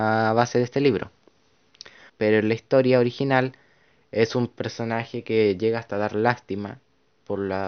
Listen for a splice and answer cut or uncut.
cut